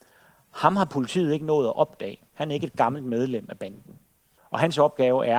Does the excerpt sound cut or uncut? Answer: cut